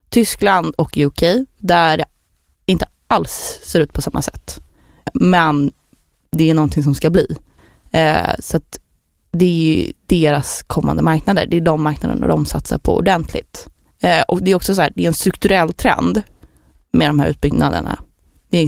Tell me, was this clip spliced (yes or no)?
no